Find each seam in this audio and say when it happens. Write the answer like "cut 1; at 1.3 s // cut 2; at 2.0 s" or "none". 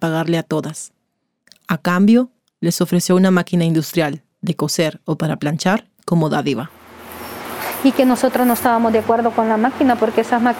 none

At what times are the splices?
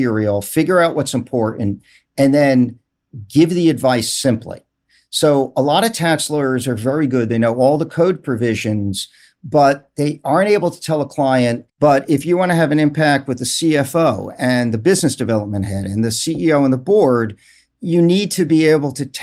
cut 1; at 11.7 s

